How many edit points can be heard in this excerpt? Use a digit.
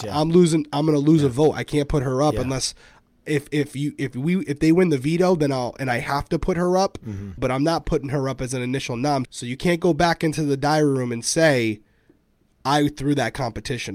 2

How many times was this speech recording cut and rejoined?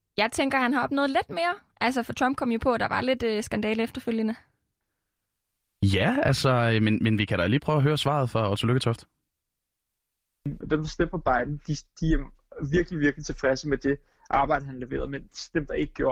1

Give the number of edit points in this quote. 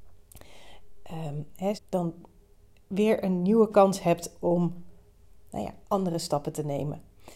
2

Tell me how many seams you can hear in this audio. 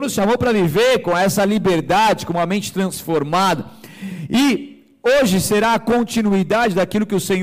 0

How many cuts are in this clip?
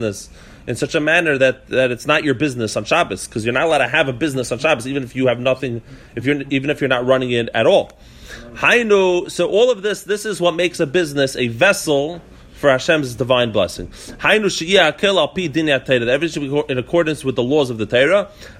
0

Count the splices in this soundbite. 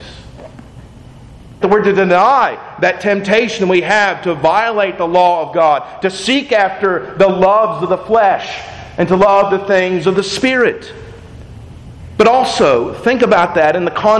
1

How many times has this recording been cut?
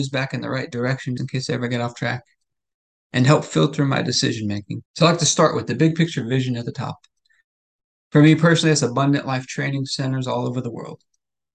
2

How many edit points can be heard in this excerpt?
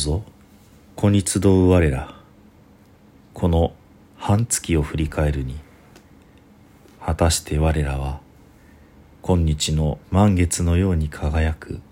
2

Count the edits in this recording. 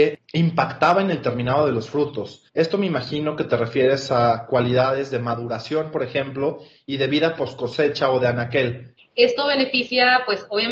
1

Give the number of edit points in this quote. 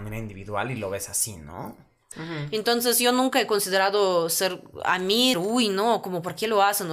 2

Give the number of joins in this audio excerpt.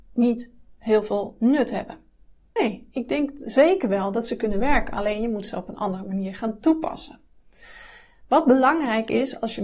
1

